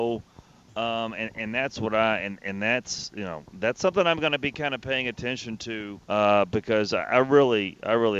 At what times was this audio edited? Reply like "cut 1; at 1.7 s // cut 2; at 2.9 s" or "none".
cut 1; at 6.0 s